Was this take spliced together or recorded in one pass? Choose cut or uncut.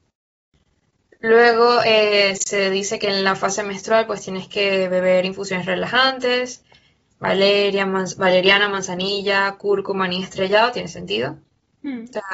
uncut